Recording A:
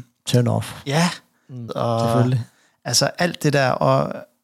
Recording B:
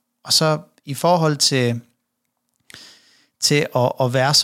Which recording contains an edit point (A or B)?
A